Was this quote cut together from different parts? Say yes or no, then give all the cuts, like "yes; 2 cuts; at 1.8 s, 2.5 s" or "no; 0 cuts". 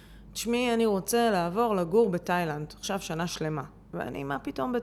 no; 0 cuts